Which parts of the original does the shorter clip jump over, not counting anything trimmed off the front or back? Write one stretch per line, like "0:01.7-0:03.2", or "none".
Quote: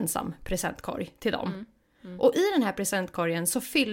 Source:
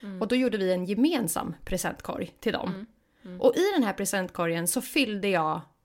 none